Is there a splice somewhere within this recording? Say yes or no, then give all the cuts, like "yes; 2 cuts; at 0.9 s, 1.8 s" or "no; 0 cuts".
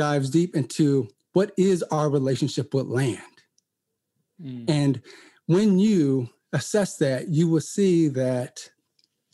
no; 0 cuts